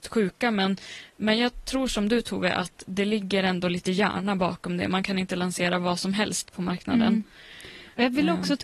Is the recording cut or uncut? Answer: uncut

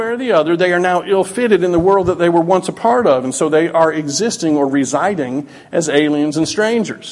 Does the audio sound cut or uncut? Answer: uncut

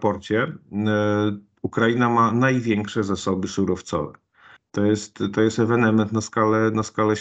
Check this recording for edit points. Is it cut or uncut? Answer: cut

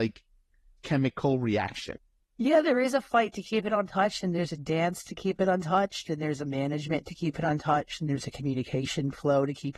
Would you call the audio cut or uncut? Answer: cut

